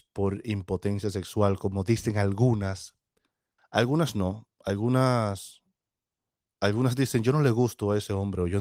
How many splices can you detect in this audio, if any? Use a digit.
1